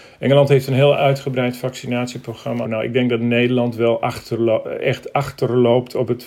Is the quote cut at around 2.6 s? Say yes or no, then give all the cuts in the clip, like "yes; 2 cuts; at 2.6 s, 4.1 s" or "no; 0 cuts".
yes; 1 cut; at 2.6 s